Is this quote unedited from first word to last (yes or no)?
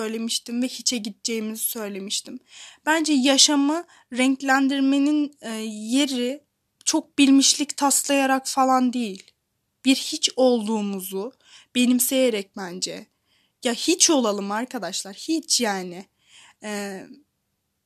yes